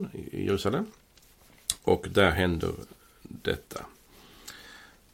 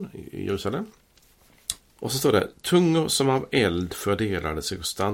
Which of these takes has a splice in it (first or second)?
second